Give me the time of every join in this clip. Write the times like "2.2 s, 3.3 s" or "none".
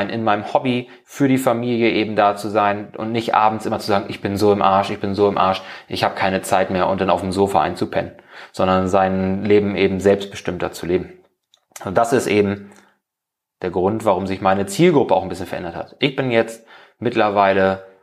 1.0 s